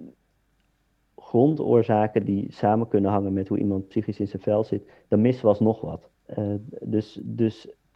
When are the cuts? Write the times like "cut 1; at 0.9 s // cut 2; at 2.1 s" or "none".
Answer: none